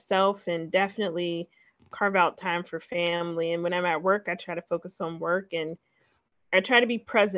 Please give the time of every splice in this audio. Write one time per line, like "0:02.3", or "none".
none